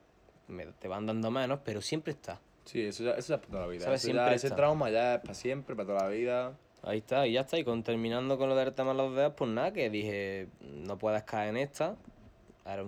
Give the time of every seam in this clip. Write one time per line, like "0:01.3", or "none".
none

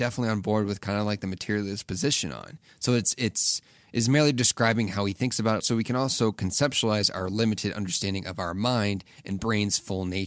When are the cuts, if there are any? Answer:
0:02.7
0:05.6

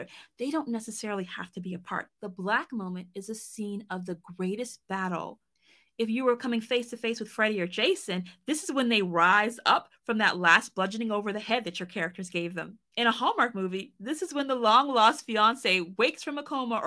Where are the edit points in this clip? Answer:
0:02.1

